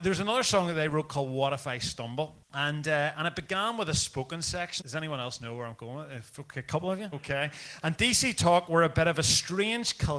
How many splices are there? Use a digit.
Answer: 3